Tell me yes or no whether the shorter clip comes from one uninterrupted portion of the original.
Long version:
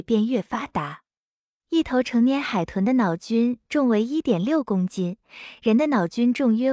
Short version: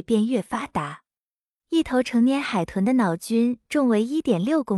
yes